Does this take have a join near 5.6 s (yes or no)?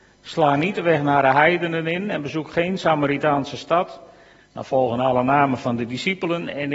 no